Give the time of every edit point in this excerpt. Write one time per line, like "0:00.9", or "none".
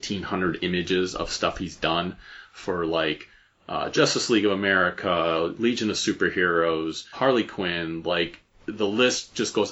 0:07.1